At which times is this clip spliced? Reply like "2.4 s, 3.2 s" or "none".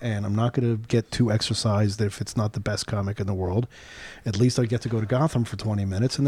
none